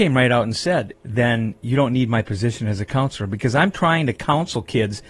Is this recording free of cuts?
no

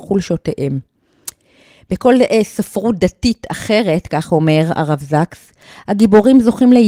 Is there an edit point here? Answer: no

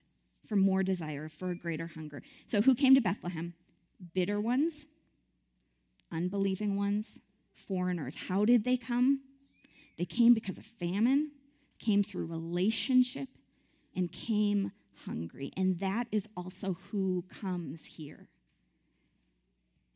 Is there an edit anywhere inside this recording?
no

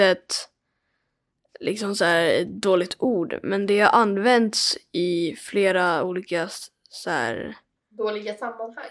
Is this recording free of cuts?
yes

